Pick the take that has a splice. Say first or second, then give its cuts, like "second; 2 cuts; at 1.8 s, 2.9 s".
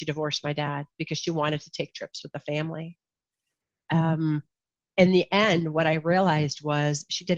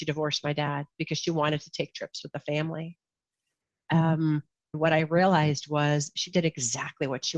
second; 1 cut; at 4.7 s